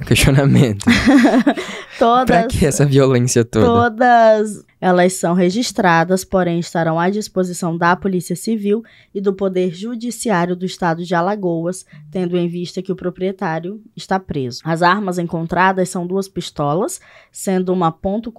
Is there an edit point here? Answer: yes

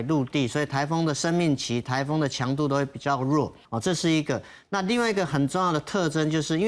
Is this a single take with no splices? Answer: no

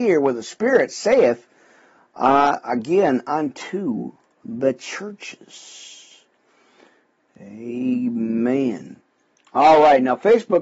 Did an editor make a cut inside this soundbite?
no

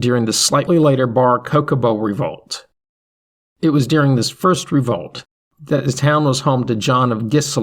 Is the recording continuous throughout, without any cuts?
yes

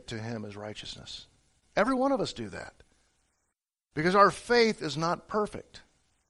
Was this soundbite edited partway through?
yes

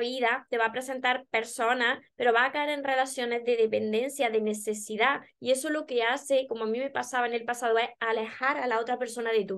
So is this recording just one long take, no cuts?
yes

